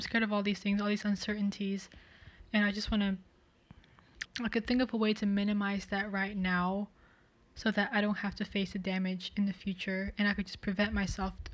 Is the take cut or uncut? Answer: cut